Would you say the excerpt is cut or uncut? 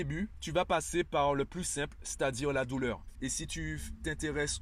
cut